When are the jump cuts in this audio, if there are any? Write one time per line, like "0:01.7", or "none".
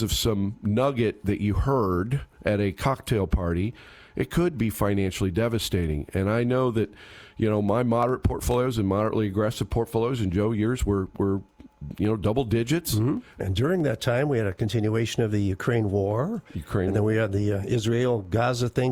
0:13.4

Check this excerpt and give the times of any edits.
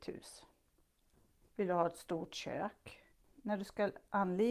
0:01.4
0:03.2

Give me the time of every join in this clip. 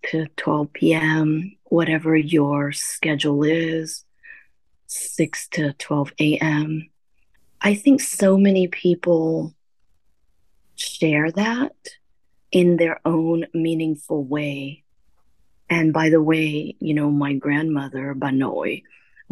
none

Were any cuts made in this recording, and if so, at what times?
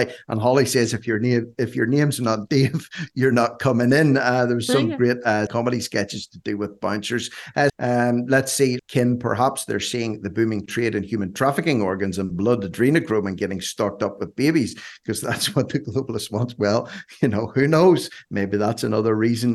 0:05.5
0:07.7
0:08.8

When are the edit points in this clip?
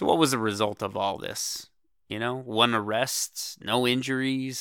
none

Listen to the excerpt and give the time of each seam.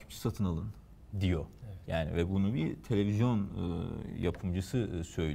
0:01.1

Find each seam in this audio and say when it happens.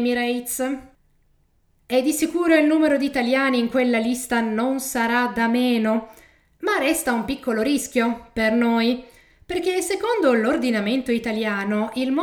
none

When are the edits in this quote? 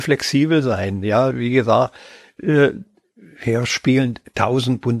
0:01.3

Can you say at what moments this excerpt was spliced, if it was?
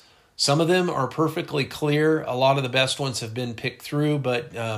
none

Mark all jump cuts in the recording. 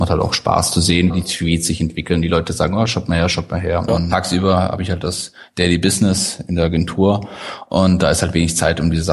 0:01.1
0:03.9

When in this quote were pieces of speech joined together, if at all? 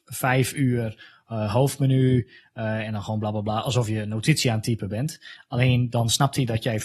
none

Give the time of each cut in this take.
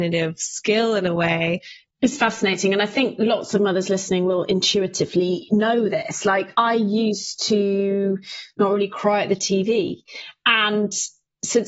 0:01.8

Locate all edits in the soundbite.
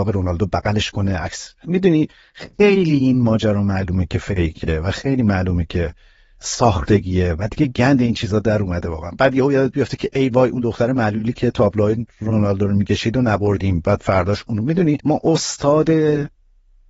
0:15.0

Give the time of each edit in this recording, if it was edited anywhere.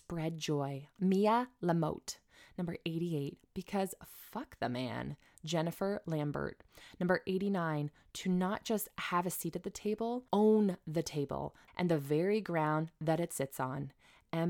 0:10.3
0:11.7

